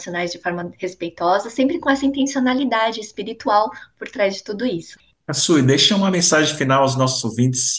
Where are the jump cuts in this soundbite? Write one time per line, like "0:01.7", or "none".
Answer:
0:05.1